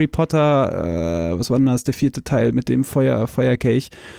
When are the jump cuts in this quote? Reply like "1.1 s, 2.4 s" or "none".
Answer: none